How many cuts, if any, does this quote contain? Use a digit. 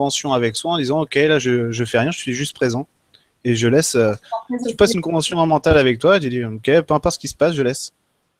1